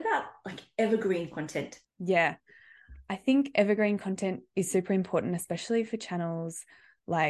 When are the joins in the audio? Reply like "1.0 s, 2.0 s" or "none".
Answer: 1.8 s